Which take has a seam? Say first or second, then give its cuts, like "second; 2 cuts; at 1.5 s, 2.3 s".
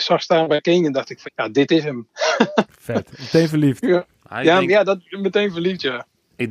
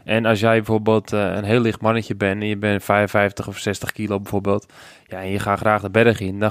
first; 1 cut; at 1.2 s